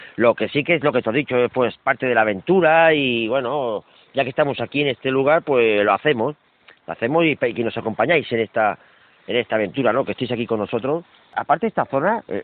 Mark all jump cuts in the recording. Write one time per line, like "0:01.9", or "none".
none